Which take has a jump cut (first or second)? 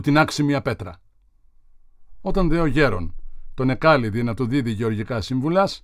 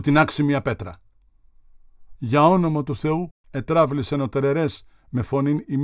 second